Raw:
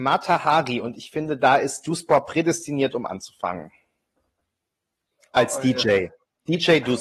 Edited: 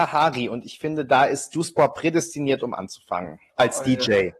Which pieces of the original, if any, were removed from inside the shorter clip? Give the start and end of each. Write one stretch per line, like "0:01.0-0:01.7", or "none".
0:03.8-0:05.3